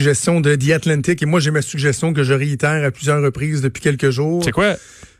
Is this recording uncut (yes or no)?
yes